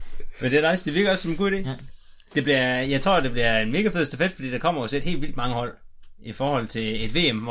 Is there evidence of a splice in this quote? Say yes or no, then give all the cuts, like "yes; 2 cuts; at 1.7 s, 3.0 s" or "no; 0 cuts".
no; 0 cuts